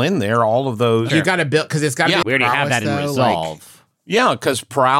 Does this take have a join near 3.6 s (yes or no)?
no